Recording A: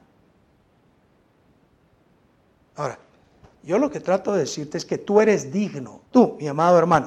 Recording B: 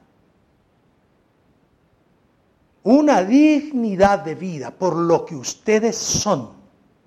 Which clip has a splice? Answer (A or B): A